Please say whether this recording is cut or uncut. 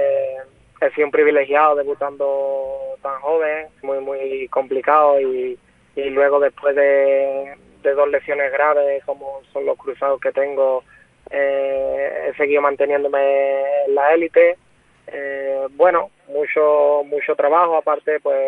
cut